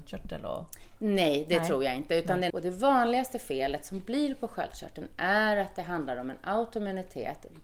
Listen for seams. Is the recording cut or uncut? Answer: cut